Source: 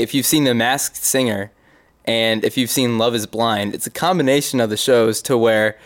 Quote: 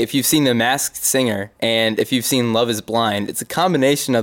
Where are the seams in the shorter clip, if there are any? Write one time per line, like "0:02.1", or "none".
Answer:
0:01.6